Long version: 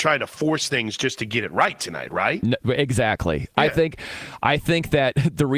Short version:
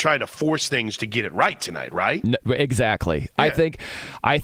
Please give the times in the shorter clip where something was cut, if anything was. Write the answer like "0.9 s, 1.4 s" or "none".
1.0 s